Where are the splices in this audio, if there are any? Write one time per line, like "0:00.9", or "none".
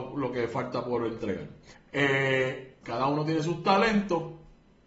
0:01.7
0:02.8